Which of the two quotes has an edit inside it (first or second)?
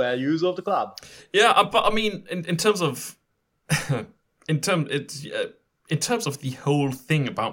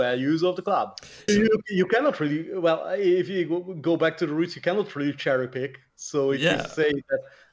second